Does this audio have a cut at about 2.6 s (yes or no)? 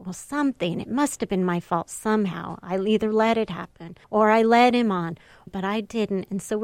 no